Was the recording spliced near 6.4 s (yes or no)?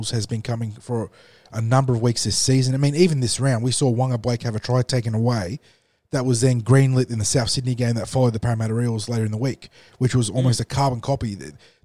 no